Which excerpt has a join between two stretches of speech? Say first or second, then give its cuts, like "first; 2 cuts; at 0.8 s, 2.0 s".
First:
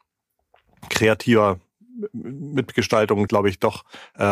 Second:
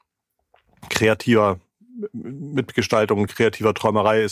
first; 1 cut; at 3.3 s